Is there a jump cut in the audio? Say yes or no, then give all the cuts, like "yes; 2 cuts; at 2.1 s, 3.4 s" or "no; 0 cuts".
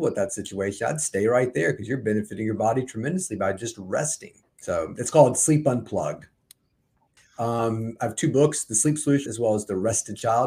yes; 3 cuts; at 4.4 s, 7.2 s, 9.3 s